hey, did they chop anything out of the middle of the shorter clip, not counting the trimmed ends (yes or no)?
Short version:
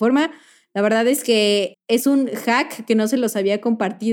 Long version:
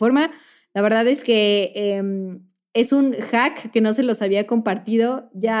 yes